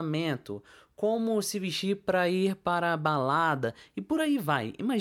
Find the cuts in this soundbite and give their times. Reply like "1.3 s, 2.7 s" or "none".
none